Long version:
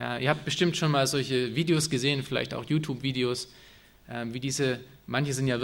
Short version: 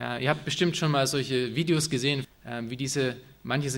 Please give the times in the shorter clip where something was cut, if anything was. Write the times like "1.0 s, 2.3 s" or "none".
2.2 s